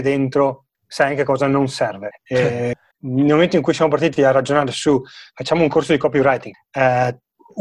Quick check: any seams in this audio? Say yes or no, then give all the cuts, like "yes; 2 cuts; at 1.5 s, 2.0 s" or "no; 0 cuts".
yes; 2 cuts; at 2.9 s, 6.5 s